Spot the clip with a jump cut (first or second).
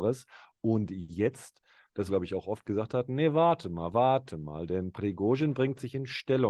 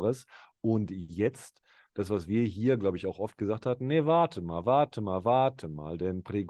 first